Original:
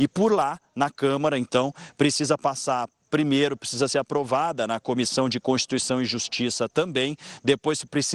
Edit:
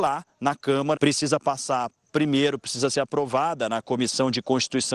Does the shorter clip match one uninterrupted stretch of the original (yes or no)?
no